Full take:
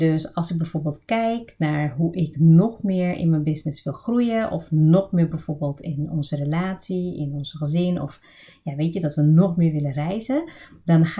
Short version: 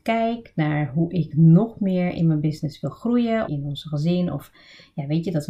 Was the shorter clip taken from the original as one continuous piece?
no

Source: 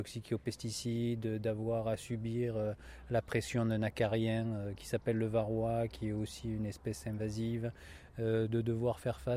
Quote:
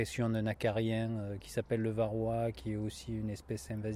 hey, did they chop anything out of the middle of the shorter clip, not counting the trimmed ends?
no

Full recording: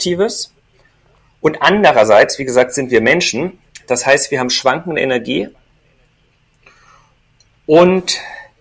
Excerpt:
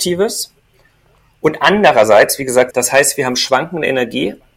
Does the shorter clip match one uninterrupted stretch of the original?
no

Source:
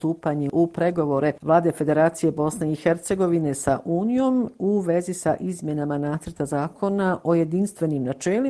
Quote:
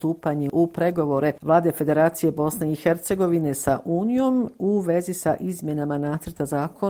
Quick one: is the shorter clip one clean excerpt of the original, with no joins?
yes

